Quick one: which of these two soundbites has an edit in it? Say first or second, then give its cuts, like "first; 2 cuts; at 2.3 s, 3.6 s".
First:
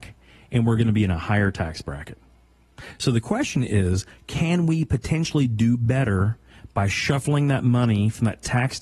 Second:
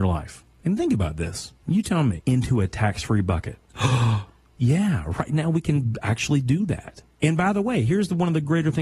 second; 1 cut; at 2.2 s